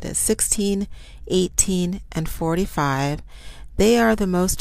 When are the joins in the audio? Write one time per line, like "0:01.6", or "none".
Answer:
none